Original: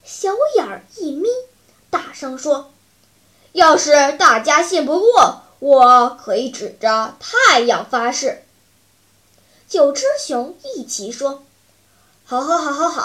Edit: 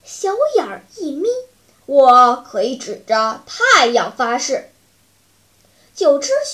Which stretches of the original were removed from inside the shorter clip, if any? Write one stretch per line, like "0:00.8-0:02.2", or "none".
0:01.8-0:05.5